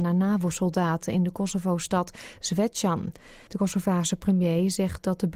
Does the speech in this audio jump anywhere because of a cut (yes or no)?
yes